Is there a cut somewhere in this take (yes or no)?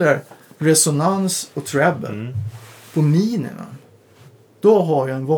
no